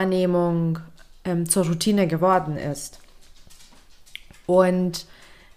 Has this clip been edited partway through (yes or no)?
no